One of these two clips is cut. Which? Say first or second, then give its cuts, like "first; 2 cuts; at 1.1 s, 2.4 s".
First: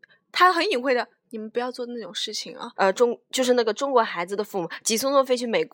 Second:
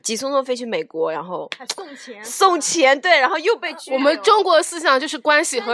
first; 1 cut; at 2.7 s